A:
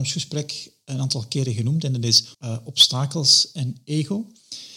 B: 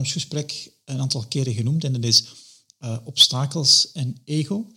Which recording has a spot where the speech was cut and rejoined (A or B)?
A